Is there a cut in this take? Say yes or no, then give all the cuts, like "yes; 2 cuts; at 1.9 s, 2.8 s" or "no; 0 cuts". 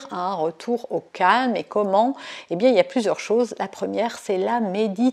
no; 0 cuts